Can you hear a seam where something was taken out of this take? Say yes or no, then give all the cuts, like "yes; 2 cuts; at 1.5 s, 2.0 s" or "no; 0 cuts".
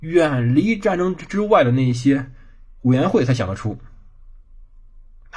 no; 0 cuts